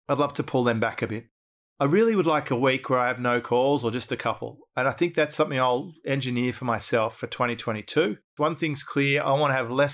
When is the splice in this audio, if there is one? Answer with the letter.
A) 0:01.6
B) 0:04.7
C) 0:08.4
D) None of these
C